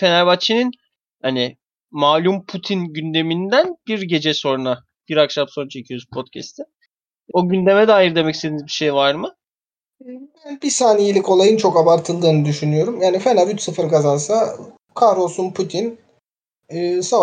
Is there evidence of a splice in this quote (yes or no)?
yes